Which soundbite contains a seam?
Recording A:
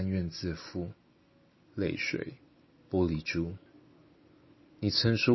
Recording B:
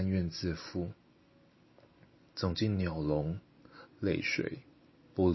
A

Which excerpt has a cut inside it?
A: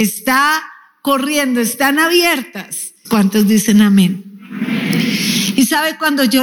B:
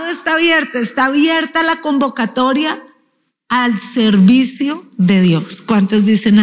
A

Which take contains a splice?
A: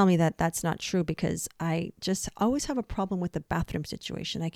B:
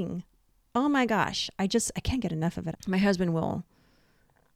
B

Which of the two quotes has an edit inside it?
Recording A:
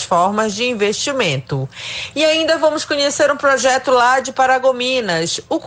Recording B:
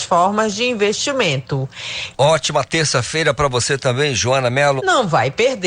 B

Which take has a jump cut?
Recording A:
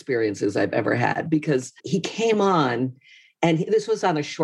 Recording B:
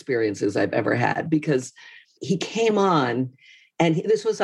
A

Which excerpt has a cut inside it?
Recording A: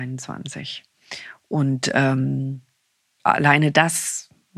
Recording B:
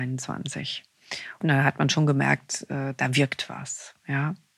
B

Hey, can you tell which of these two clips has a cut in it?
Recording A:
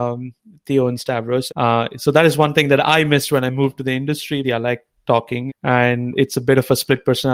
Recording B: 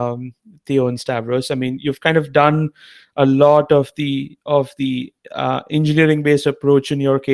A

